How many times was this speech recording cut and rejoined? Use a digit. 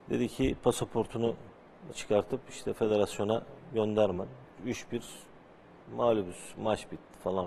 2